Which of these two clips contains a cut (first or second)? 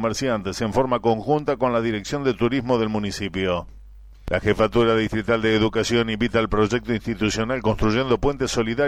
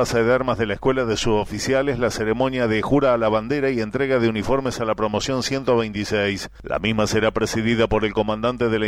second